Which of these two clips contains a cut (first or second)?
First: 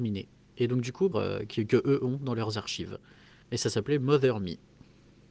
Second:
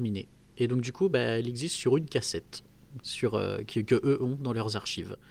first